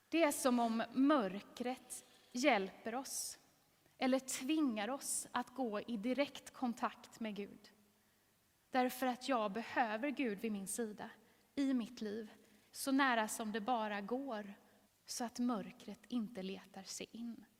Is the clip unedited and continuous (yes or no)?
no